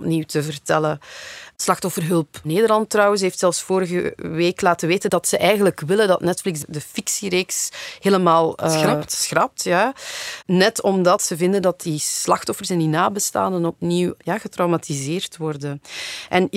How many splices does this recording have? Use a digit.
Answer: 0